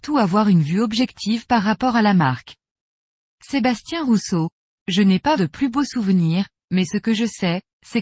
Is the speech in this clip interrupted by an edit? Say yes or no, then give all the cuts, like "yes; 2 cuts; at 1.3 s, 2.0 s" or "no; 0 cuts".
yes; 2 cuts; at 3.3 s, 5.4 s